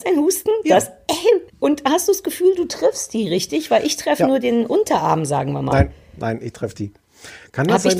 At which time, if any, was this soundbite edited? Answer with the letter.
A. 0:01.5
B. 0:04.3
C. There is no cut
A